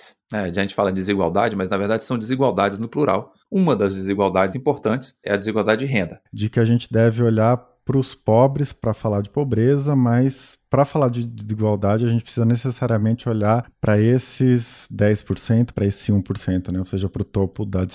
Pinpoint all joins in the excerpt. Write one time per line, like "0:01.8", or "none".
0:04.5
0:06.3
0:15.7

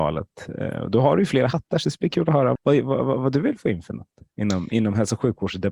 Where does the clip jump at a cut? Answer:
0:02.6

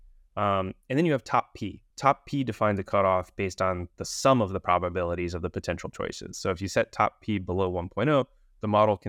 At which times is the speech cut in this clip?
0:01.9

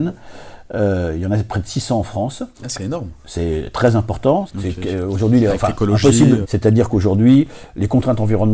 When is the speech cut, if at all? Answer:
0:02.5
0:04.5
0:06.4

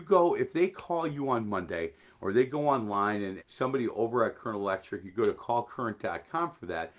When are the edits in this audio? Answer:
0:03.4

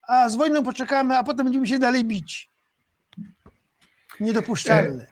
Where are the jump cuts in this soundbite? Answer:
none

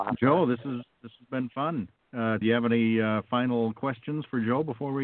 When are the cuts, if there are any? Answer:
0:02.4

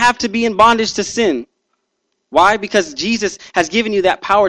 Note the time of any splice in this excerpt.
0:02.1

